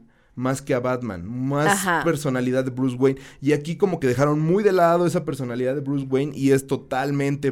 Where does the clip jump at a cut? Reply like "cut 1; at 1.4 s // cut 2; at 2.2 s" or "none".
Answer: none